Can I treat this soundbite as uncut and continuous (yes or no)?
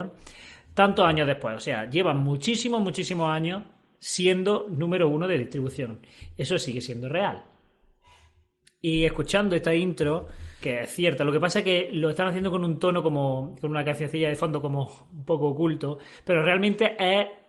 no